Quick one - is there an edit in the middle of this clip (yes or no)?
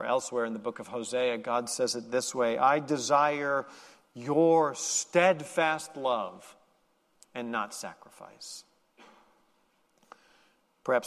no